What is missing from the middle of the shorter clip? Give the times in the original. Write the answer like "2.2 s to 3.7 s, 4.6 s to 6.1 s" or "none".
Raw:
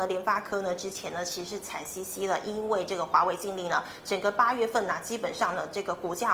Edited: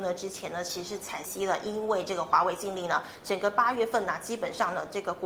1.8 s to 2.0 s